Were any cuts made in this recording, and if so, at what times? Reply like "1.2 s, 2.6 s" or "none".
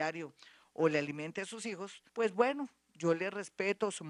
2.1 s

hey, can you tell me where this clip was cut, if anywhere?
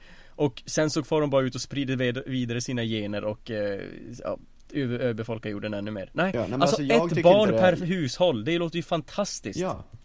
none

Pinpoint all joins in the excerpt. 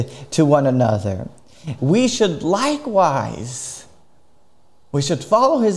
1.8 s

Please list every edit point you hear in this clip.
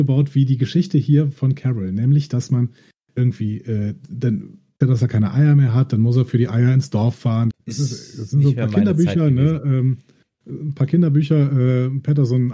4.8 s, 7.5 s

